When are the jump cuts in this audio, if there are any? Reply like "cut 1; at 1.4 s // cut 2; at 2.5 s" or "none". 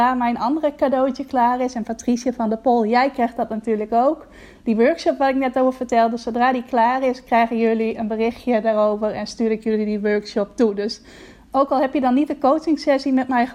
none